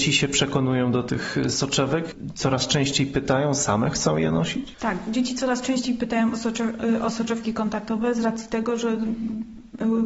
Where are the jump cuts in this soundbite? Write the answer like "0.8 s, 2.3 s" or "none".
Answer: none